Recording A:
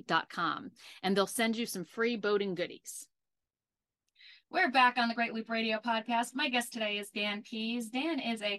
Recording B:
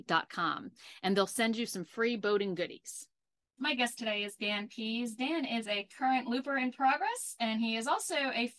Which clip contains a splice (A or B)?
B